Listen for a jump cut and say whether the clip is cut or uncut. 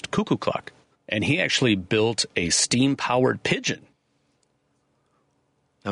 cut